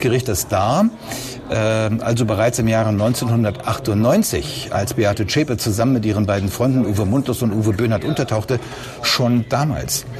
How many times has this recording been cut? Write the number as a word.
zero